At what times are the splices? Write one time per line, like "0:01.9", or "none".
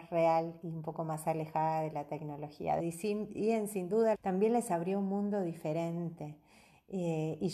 0:02.8
0:04.1